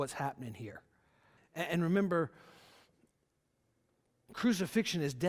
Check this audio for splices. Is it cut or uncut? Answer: cut